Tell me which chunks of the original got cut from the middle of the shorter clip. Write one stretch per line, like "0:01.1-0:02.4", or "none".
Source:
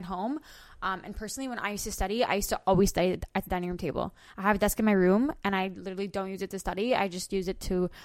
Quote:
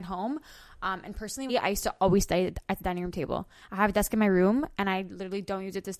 0:01.5-0:02.1